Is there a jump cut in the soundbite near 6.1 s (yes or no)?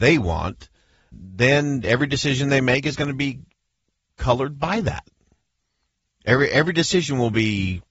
no